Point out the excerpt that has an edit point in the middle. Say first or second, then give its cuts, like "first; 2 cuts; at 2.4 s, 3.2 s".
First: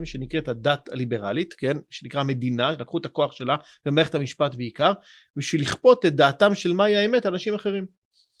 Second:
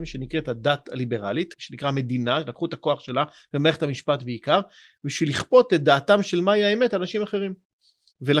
second; 1 cut; at 1.5 s